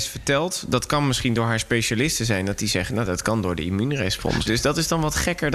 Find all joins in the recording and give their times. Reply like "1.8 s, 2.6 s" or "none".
4.5 s